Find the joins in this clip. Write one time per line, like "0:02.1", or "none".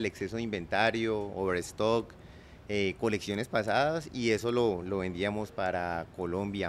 none